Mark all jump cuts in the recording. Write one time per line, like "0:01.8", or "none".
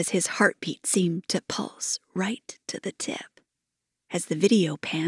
none